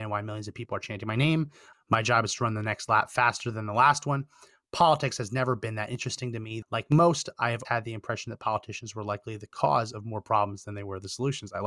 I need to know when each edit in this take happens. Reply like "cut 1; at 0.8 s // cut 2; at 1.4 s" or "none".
cut 1; at 1.7 s // cut 2; at 6.6 s // cut 3; at 7.6 s